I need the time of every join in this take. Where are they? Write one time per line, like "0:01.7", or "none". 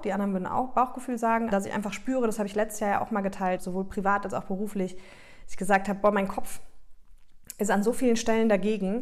0:01.5
0:03.6

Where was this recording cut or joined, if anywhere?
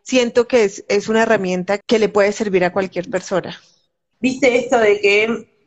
0:01.8
0:04.1

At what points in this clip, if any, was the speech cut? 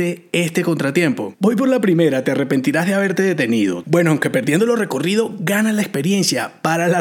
0:03.8

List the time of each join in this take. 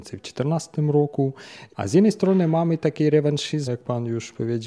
0:01.7
0:03.7

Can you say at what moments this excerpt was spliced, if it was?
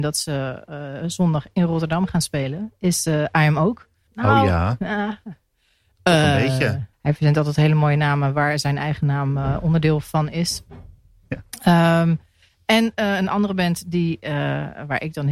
0:04.1
0:06.9

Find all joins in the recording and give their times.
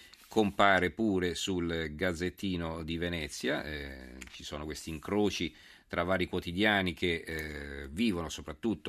none

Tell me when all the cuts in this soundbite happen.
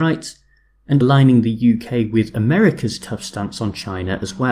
0:01.0

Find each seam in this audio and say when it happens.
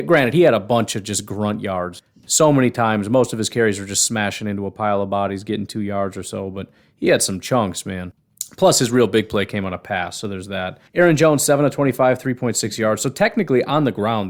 0:10.9

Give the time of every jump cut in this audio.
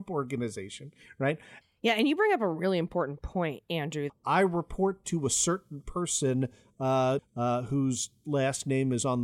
0:01.6
0:04.1
0:07.2

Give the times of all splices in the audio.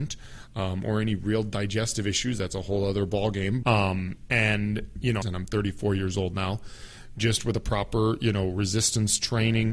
0:03.6
0:05.2

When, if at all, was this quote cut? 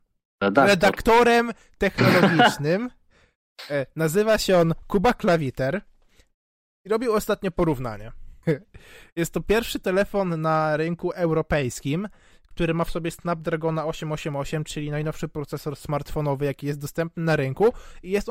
0:08.4

